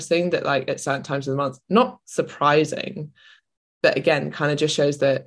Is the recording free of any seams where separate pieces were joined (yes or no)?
yes